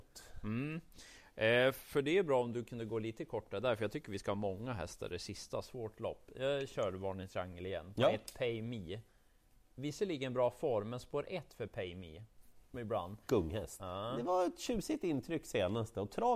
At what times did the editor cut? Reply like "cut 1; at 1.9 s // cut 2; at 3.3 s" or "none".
cut 1; at 12.7 s // cut 2; at 13.8 s